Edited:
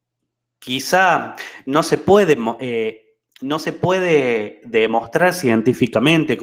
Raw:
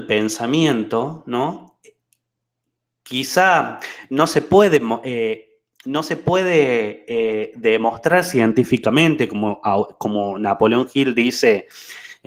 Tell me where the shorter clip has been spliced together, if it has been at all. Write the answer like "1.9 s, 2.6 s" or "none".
4.6 s